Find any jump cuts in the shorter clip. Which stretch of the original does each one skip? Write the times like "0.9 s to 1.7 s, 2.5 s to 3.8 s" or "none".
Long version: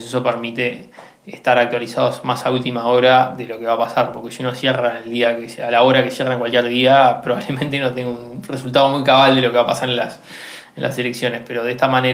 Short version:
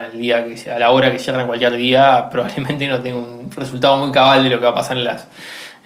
none